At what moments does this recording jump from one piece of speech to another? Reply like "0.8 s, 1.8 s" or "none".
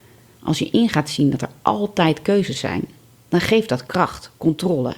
none